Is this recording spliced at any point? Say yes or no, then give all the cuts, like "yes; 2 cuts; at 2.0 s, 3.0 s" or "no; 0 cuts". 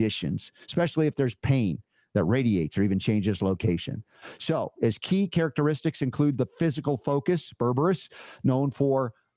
no; 0 cuts